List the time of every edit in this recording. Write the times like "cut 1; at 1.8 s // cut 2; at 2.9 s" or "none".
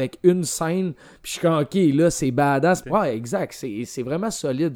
cut 1; at 2.8 s